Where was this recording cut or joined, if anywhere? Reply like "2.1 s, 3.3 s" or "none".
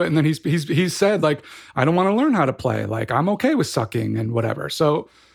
none